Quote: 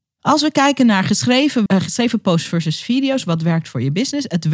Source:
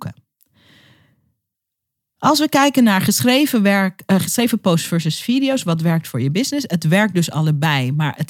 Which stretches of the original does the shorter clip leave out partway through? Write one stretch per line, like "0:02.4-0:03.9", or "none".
0:03.6-0:04.0